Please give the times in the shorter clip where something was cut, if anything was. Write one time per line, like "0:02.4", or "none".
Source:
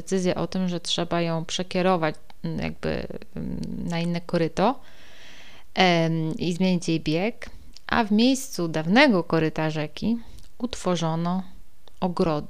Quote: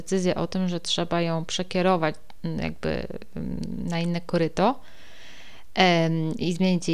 none